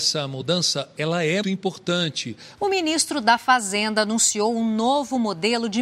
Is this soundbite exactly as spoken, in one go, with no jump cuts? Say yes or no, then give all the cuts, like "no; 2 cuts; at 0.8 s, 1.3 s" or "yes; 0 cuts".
no; 2 cuts; at 1.4 s, 2.6 s